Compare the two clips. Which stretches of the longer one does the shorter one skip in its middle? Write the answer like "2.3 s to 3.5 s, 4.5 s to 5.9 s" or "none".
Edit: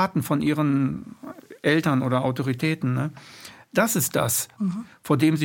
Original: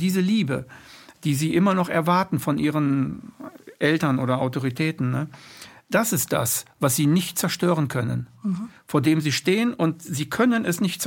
6.7 s to 8.4 s